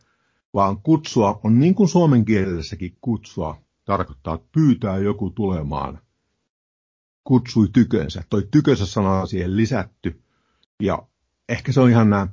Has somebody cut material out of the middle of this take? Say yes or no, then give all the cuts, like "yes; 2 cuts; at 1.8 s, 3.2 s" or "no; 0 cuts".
no; 0 cuts